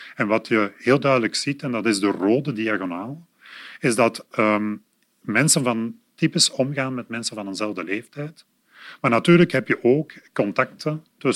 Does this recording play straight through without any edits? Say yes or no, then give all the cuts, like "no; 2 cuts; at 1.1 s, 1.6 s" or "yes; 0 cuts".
yes; 0 cuts